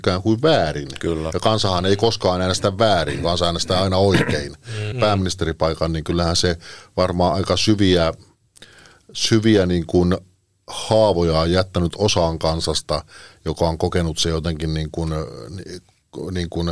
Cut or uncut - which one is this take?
cut